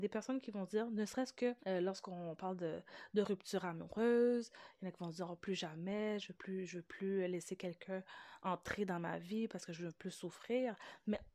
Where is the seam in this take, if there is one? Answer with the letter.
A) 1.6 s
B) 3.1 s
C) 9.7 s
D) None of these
A